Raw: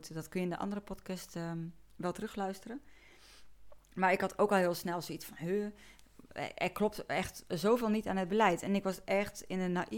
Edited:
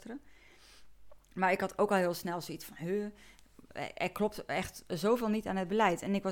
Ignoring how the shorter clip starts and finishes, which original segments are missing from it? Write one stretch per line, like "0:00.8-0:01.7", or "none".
none